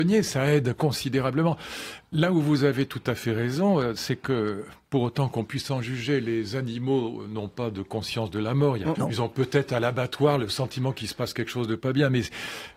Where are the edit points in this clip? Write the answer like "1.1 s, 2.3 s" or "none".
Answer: 8.9 s